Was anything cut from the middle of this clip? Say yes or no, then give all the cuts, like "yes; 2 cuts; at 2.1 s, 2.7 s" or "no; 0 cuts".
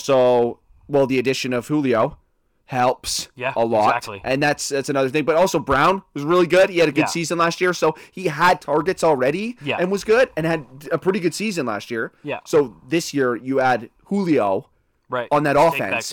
no; 0 cuts